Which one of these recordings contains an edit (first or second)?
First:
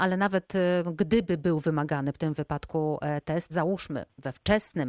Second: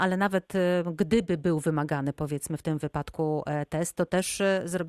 first